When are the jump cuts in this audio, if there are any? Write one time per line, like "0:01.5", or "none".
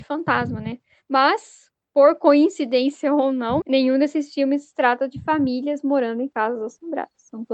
0:03.6